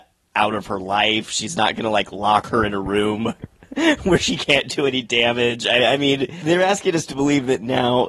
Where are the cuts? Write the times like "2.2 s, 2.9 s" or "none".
none